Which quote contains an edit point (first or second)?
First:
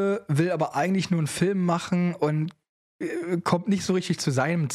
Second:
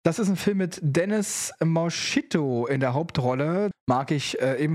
second